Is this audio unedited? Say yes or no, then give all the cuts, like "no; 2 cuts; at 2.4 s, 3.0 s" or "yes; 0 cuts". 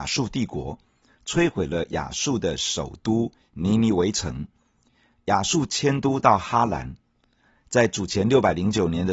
yes; 0 cuts